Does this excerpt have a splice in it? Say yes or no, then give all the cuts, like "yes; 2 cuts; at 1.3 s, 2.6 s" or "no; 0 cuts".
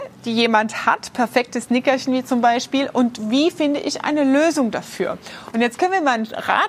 yes; 1 cut; at 5.5 s